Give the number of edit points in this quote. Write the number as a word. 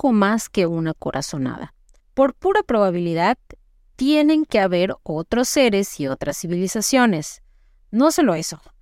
one